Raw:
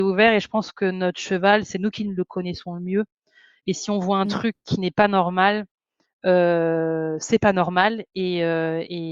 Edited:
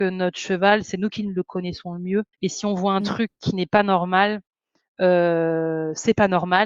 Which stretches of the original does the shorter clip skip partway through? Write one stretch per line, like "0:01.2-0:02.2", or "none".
0:03.1-0:03.6